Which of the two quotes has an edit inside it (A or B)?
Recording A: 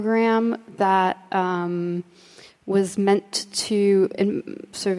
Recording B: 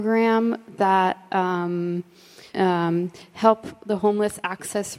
B